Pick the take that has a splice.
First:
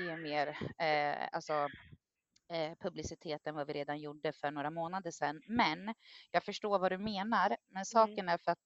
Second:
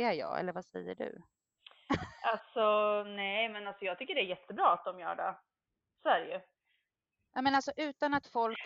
second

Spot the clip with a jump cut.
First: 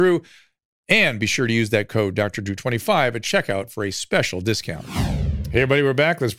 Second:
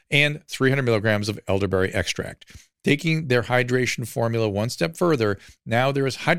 second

